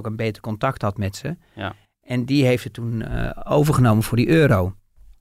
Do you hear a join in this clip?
yes; 1 cut; at 3.4 s

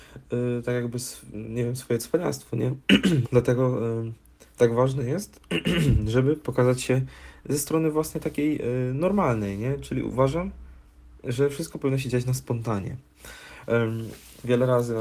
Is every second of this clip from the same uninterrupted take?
no; 1 cut; at 3.2 s

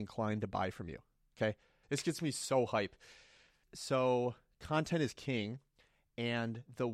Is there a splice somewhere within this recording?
yes; 2 cuts; at 1.8 s, 3.6 s

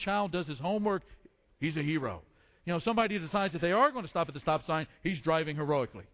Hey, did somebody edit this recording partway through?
no; 0 cuts

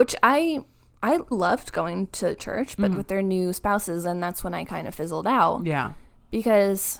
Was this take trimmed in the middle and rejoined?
yes; 2 cuts; at 1.3 s, 2.9 s

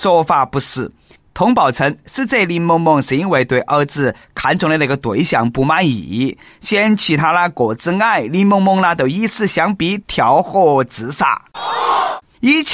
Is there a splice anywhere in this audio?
no; 0 cuts

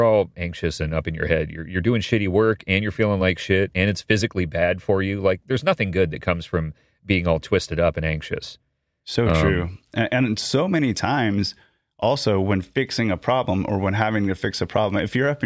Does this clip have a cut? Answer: no; 0 cuts

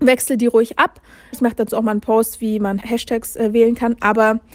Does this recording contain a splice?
yes; 2 cuts; at 1.3 s, 2.8 s

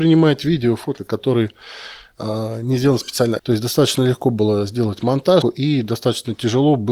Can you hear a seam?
yes; 3 cuts; at 1.0 s, 3.4 s, 5.4 s

